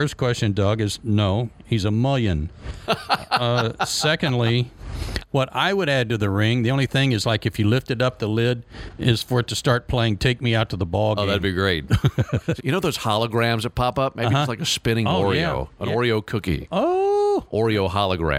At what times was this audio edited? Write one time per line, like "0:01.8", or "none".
0:12.6

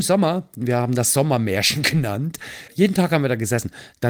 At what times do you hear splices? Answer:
none

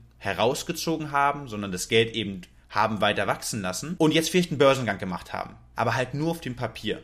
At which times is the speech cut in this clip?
0:05.7

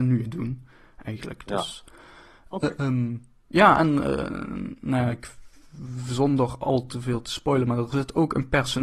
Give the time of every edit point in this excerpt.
none

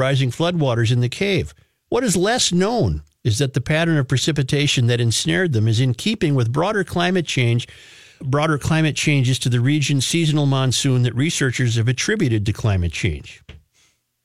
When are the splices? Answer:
0:08.2

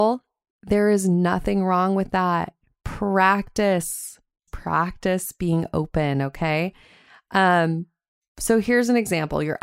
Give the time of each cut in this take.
0:04.5

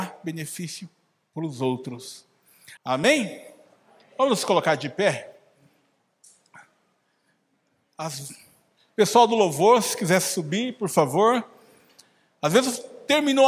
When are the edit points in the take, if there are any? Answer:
0:02.8

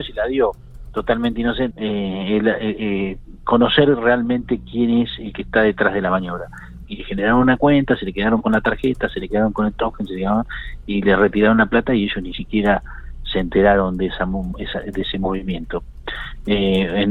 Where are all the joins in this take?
0:01.7
0:06.9

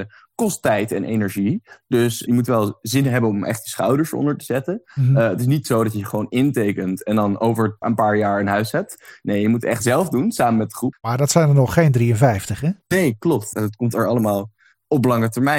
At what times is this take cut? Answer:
0:10.9
0:13.5

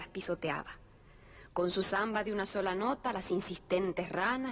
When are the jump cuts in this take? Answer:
none

